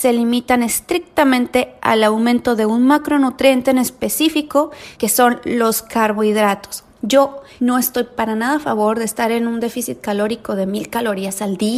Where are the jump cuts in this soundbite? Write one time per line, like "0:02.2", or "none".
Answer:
0:07.0